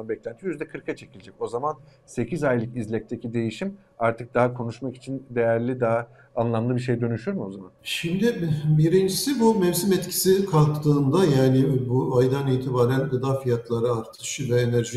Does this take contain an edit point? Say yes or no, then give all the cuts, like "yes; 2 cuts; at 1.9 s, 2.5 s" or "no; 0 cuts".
no; 0 cuts